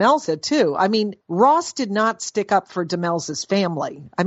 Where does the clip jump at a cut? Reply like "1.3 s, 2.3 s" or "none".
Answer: 1.2 s